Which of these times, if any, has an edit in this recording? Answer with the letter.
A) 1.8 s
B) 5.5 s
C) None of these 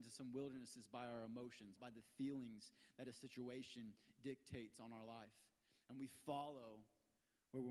A